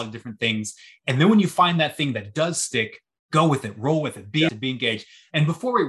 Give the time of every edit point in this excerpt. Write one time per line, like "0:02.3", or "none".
0:04.5